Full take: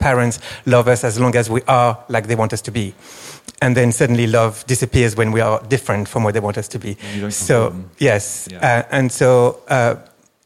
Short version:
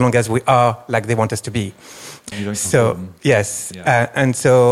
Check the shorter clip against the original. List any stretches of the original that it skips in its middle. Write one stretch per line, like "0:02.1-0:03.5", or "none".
0:03.5-0:07.1